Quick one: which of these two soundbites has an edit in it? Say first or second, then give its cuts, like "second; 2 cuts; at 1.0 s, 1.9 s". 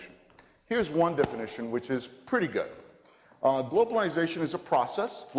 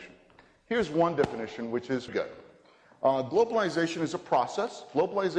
second; 1 cut; at 2.1 s